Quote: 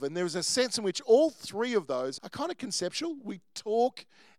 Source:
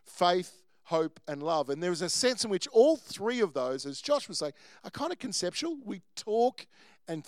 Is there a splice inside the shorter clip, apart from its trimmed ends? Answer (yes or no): yes